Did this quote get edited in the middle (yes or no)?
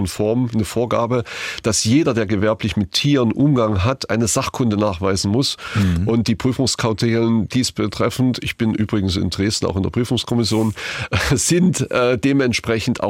no